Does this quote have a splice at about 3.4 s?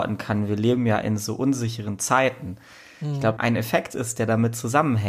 yes; 1 cut; at 3.4 s

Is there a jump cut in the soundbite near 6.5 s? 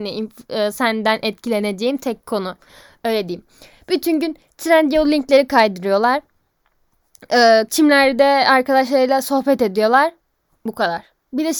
no; 1 cut; at 7.7 s

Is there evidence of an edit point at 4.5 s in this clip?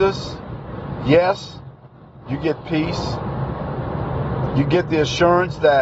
yes; 2 cuts; at 2.2 s, 4.5 s

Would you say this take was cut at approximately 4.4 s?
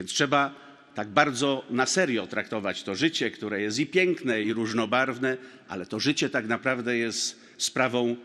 yes; 1 cut; at 4.4 s

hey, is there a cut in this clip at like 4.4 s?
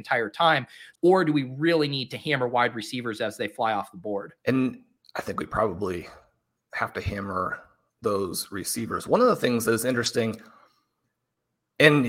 yes; 2 cuts; at 0.9 s, 4.4 s

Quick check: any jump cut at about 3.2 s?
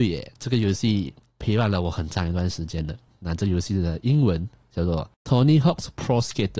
no; 0 cuts

